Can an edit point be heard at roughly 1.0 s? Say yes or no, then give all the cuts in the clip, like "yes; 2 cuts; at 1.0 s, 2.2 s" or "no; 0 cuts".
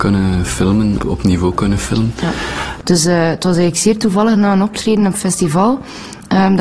yes; 2 cuts; at 1.0 s, 2.8 s